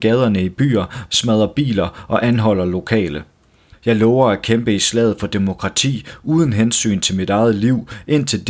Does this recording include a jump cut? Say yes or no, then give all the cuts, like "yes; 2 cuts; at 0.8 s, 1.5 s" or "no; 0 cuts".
yes; 2 cuts; at 1.1 s, 3.7 s